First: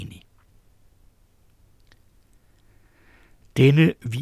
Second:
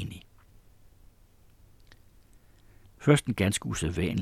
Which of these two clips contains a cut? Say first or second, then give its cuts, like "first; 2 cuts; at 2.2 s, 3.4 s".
second; 1 cut; at 2.8 s